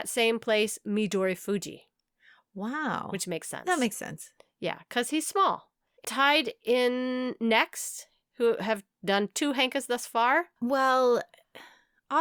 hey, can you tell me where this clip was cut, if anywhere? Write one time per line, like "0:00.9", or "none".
0:06.0
0:10.6